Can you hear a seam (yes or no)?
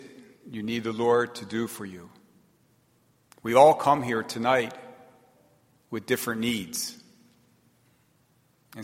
yes